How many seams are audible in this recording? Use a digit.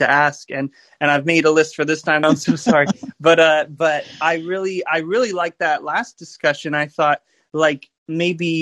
1